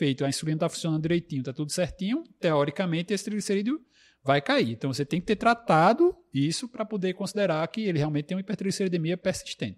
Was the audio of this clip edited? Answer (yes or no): no